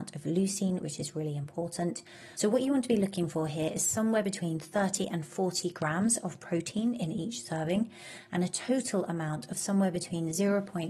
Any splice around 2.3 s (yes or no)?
yes